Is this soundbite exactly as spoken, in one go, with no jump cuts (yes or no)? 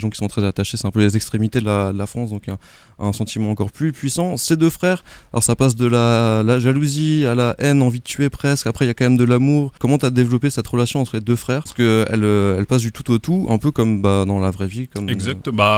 yes